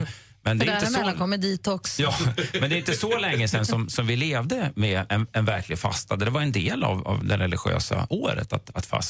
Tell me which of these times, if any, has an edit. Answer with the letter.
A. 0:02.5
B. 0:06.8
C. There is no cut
C